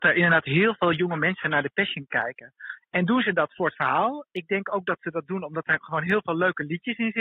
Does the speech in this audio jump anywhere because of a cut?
no; 0 cuts

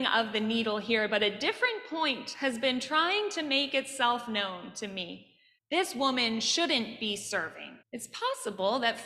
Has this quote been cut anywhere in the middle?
yes; 2 cuts; at 5.6 s, 7.8 s

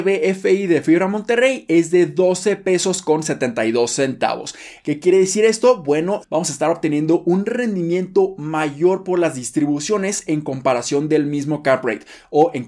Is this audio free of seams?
no; 2 cuts; at 4.8 s, 6.2 s

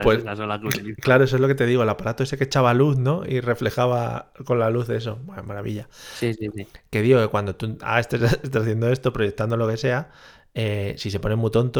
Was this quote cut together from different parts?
no; 0 cuts

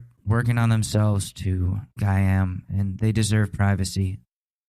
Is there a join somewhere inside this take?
yes; 1 cut; at 2.0 s

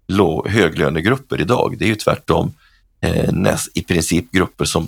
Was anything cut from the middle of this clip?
no; 0 cuts

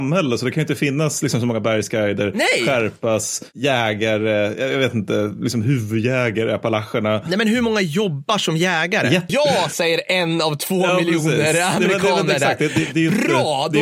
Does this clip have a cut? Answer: yes; 1 cut; at 9.3 s

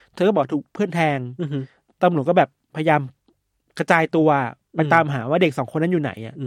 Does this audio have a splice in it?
no; 0 cuts

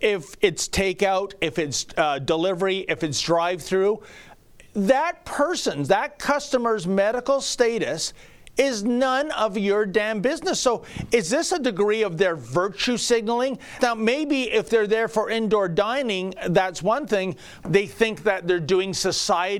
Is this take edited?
yes; 2 cuts; at 13.8 s, 17.6 s

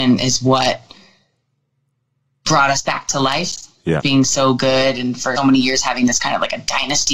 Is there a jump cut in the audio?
yes; 2 cuts; at 4.0 s, 5.4 s

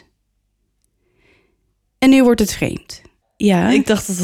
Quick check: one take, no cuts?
no; 1 cut; at 3.2 s

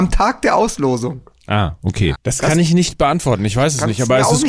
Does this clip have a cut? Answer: yes; 1 cut; at 2.2 s

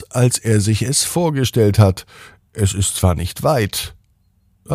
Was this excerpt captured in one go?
yes; 0 cuts

